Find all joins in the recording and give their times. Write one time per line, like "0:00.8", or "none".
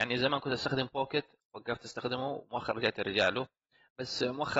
none